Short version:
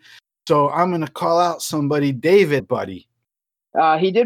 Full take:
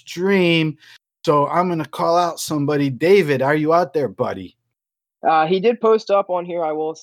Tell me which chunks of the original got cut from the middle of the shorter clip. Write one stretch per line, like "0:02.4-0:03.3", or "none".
0:03.4-0:04.1